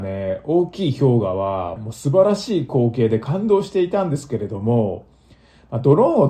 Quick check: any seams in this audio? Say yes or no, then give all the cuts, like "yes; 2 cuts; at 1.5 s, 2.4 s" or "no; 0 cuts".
yes; 1 cut; at 1.8 s